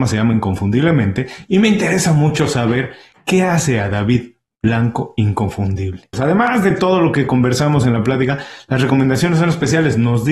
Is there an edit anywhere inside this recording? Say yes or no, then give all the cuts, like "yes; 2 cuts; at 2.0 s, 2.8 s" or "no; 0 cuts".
yes; 1 cut; at 6.1 s